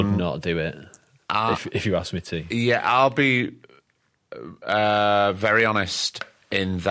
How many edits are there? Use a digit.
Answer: 0